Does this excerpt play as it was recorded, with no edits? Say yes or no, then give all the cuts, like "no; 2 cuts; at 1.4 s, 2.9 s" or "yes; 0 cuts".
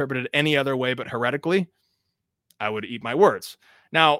yes; 0 cuts